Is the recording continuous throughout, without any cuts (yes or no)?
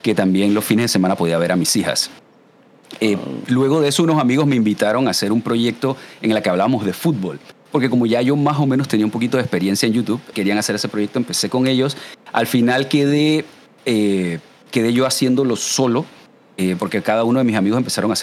no